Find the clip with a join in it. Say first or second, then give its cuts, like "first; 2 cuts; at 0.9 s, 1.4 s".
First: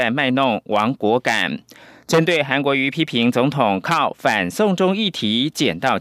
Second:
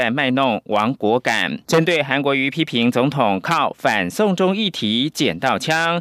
second; 1 cut; at 1.6 s